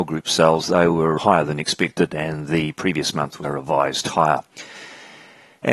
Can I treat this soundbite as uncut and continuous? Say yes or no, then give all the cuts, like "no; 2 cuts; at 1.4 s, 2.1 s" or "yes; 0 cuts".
no; 2 cuts; at 1.2 s, 3.4 s